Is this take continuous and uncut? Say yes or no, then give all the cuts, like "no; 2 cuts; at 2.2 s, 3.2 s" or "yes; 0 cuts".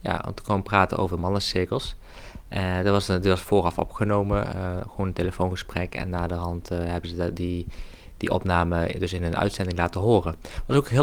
yes; 0 cuts